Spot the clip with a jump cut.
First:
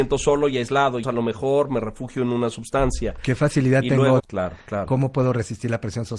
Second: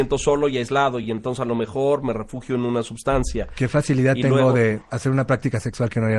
first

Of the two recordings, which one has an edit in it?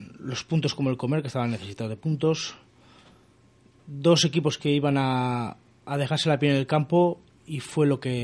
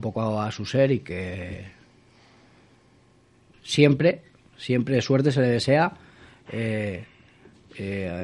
second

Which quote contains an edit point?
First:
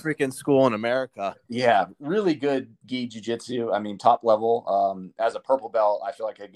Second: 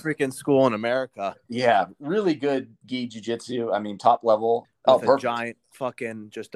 second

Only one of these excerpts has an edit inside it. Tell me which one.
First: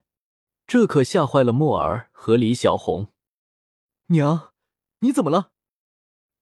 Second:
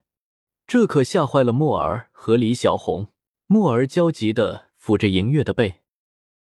second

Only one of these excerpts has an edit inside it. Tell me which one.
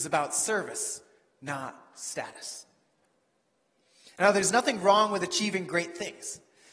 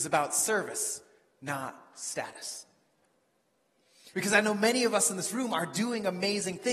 second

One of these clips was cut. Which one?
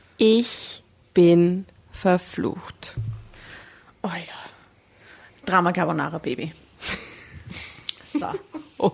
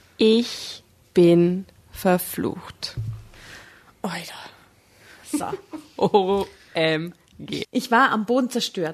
second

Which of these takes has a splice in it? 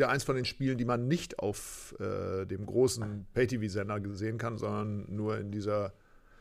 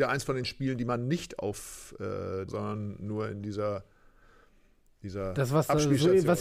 second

